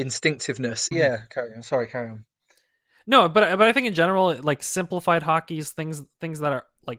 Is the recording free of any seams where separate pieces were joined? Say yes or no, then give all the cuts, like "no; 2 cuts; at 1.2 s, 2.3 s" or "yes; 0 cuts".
no; 1 cut; at 0.9 s